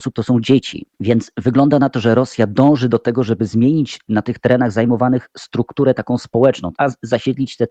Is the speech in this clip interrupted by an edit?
yes; 2 cuts; at 0.9 s, 6.7 s

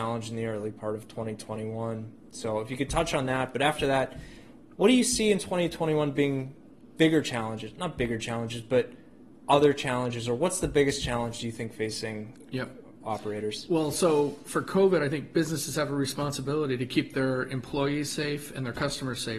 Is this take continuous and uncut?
yes; 0 cuts

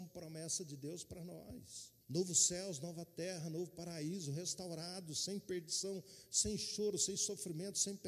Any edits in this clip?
yes; 1 cut; at 2.0 s

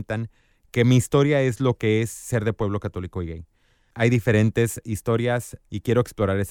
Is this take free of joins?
yes; 0 cuts

